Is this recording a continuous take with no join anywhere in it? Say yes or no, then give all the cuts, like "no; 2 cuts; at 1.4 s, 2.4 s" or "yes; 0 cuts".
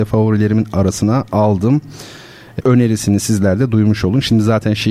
no; 1 cut; at 2.6 s